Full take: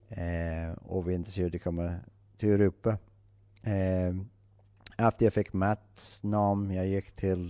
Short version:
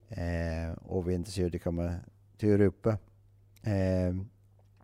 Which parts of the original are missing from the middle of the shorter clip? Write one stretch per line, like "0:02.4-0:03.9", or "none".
none